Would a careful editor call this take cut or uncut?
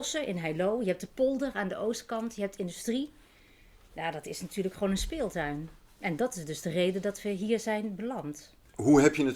uncut